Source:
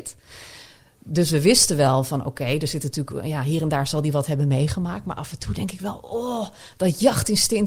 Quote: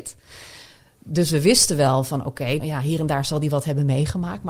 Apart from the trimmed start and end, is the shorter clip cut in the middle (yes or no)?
yes